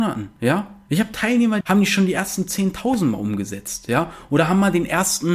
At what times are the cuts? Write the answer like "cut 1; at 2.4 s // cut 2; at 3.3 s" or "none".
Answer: cut 1; at 1.6 s